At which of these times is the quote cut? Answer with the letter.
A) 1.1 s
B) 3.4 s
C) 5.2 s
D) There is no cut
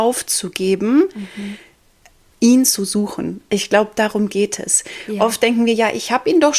D